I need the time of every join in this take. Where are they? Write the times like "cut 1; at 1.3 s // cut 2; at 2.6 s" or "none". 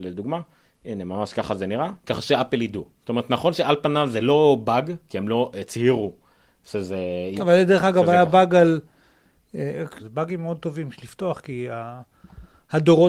cut 1; at 2.0 s // cut 2; at 7.4 s // cut 3; at 10.0 s